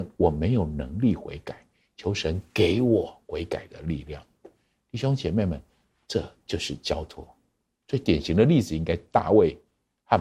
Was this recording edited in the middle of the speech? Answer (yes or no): no